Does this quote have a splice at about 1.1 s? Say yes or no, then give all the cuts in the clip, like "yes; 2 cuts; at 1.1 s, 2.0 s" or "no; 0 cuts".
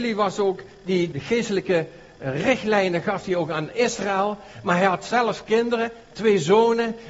yes; 1 cut; at 1.1 s